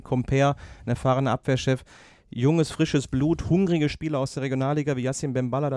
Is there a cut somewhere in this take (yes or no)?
no